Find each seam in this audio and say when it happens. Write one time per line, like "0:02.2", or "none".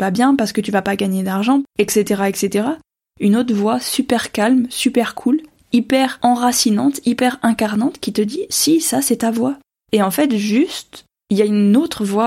0:03.0
0:09.7